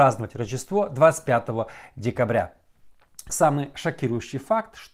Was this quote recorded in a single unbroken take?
no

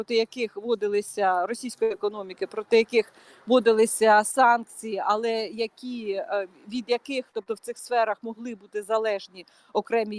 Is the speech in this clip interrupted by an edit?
no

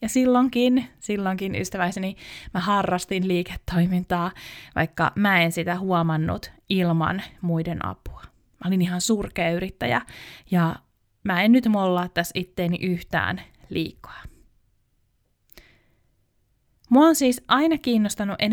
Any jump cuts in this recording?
no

